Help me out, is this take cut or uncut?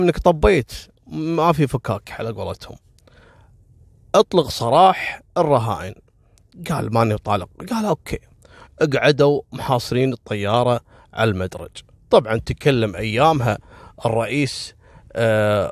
cut